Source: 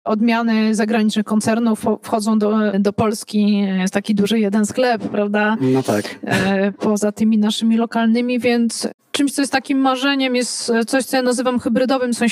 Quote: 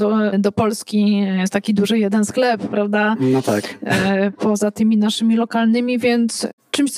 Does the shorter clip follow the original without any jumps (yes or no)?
yes